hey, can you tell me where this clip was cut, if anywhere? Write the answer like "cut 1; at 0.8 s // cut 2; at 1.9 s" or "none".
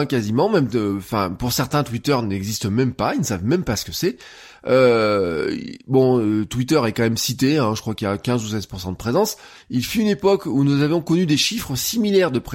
cut 1; at 9.6 s